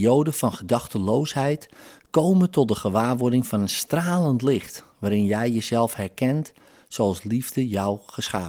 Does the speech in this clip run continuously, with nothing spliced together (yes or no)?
yes